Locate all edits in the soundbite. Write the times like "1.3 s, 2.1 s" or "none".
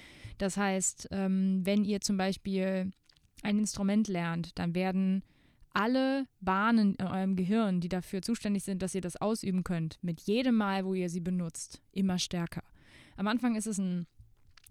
none